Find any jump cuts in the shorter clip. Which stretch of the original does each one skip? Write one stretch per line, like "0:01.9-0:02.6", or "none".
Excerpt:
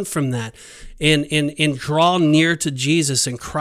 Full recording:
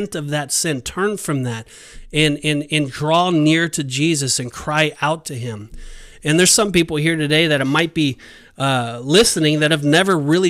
none

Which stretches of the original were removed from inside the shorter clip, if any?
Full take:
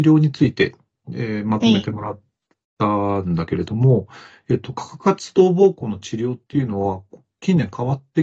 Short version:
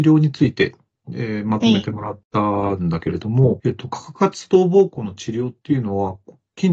0:02.2-0:02.7
0:04.1-0:04.4

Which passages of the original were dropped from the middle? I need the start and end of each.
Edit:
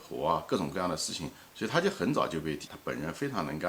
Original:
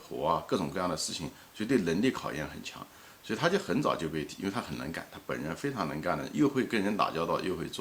0:01.5-0:03.2
0:04.4-0:05.1

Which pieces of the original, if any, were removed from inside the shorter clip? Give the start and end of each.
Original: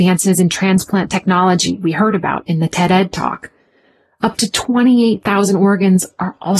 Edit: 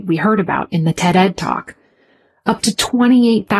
none

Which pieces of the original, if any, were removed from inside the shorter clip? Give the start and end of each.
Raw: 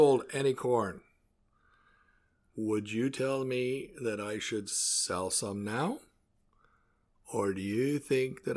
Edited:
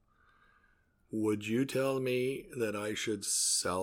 none

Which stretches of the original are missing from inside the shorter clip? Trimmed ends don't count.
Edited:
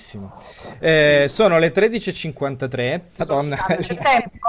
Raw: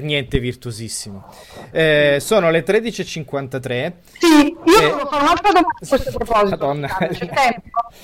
0:04.1-0:06.5

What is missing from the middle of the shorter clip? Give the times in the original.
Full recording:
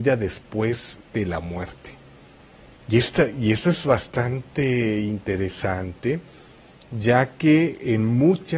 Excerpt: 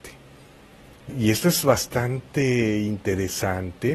0:02.9-0:03.3

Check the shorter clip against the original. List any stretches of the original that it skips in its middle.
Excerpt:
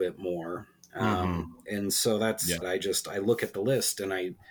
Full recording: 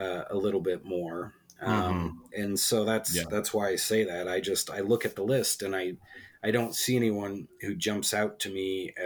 0:03.3-0:04.2

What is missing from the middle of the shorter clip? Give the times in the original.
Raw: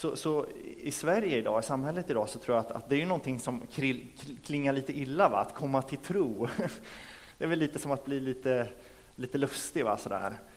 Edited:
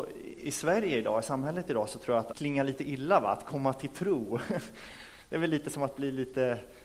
0:02.7-0:04.4

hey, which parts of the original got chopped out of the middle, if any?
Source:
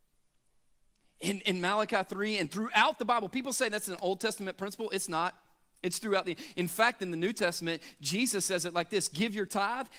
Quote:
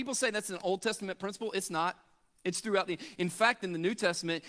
none

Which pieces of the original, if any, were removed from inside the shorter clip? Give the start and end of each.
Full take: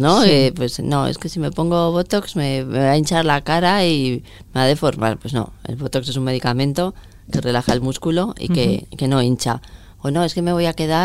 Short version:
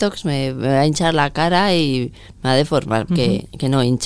0:05.2-0:08.5

